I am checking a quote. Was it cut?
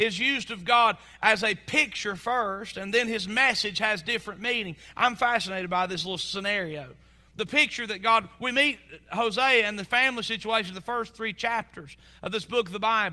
no; 0 cuts

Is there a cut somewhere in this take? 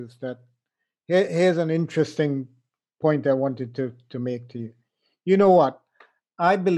no; 0 cuts

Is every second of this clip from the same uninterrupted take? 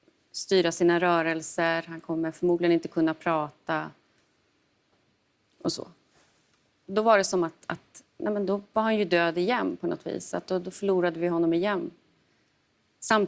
yes; 0 cuts

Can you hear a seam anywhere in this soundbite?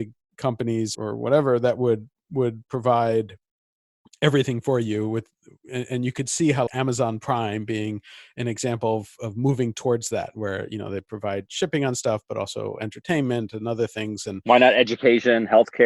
yes; 2 cuts; at 0.9 s, 6.7 s

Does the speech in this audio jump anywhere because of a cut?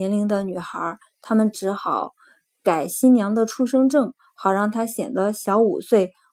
no; 0 cuts

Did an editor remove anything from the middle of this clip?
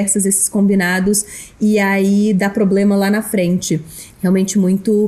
yes; 1 cut; at 4.1 s

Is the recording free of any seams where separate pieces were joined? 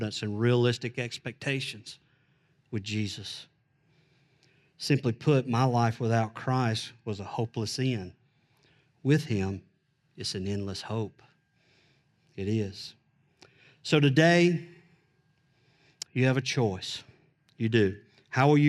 yes; 0 cuts

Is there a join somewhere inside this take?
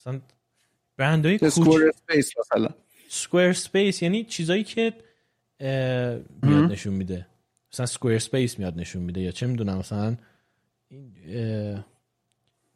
yes; 1 cut; at 6.4 s

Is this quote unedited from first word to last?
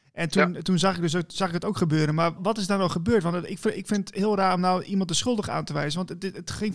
no; 1 cut; at 2.4 s

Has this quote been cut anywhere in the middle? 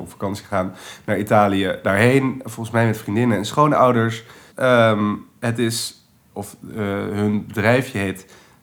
yes; 1 cut; at 4.5 s

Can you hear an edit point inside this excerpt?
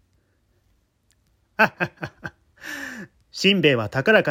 yes; 2 cuts; at 1.7 s, 3.1 s

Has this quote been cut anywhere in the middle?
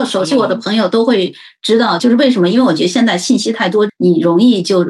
yes; 2 cuts; at 2.0 s, 3.9 s

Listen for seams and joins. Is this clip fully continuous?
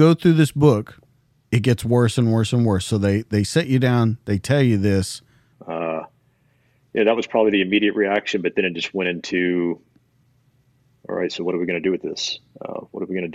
no; 1 cut; at 5.5 s

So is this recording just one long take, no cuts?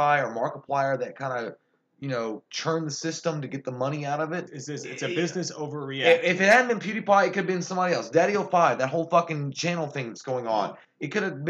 no; 1 cut; at 4.5 s

